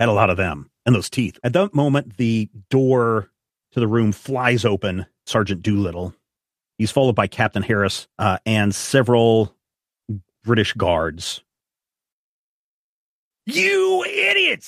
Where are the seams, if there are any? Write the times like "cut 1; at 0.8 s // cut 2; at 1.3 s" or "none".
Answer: cut 1; at 1.4 s // cut 2; at 5.3 s // cut 3; at 8.1 s